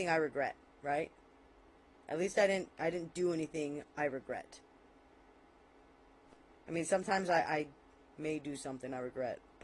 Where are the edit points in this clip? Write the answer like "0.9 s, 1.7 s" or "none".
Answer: none